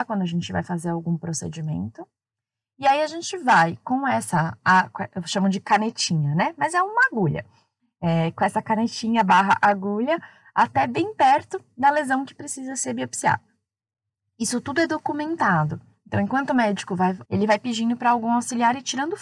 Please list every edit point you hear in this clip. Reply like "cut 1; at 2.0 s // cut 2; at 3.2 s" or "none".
cut 1; at 17.2 s